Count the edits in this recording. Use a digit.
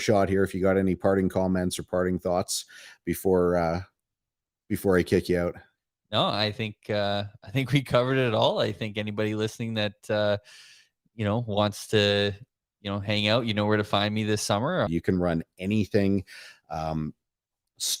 1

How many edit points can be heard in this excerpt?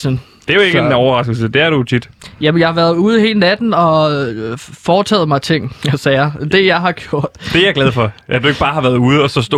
0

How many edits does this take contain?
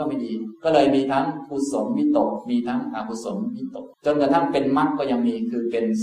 1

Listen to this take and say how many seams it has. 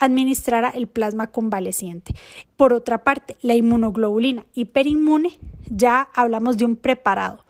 1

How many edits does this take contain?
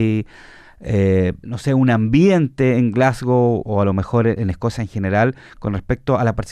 2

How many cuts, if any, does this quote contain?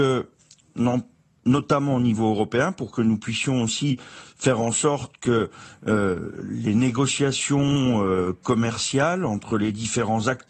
0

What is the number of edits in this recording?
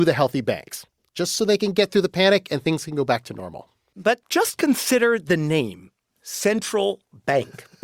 0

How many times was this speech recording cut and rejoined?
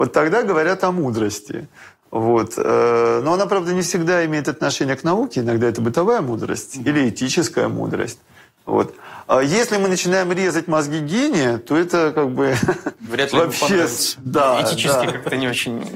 0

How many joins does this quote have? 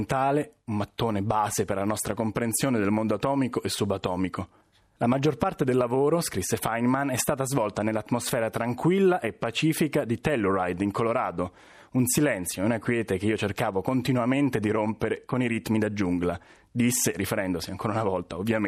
0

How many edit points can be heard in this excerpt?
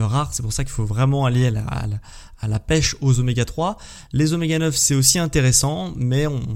0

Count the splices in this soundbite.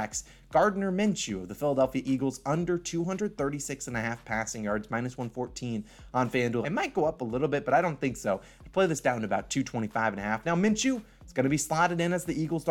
1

